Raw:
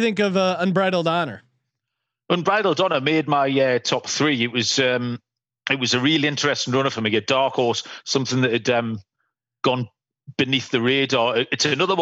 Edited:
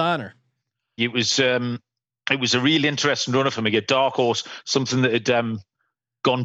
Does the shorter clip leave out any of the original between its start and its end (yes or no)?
yes